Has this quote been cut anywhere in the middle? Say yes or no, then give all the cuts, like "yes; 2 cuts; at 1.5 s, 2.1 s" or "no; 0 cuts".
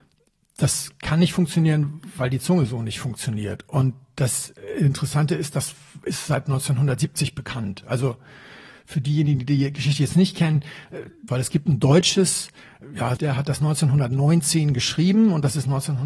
yes; 2 cuts; at 11.3 s, 13.2 s